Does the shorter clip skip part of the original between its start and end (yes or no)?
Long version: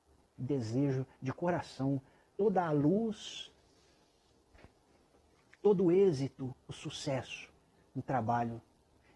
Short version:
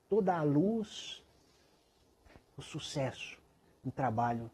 yes